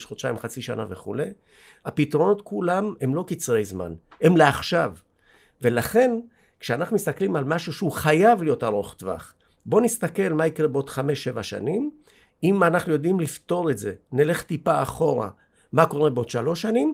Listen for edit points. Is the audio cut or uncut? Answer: uncut